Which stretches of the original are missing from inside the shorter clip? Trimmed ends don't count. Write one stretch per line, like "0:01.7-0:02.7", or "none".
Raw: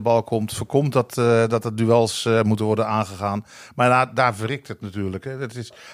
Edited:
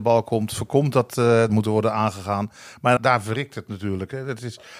0:01.5-0:02.4
0:03.9-0:04.1